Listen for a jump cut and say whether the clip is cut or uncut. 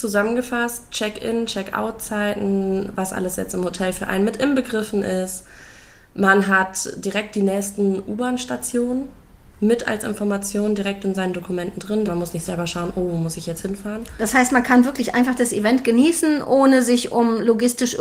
cut